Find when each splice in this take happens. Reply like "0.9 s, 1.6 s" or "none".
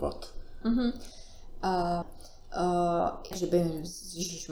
2.0 s, 3.3 s